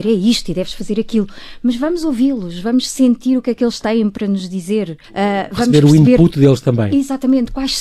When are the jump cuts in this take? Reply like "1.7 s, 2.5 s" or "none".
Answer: 5.0 s